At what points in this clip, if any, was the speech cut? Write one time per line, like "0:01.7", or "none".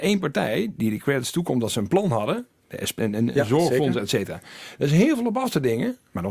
0:03.0